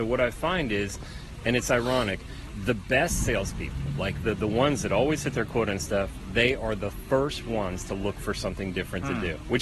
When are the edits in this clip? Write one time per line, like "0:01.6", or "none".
none